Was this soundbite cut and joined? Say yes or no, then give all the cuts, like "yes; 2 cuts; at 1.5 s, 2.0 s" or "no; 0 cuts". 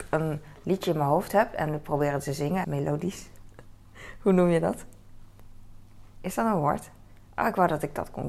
yes; 1 cut; at 2.6 s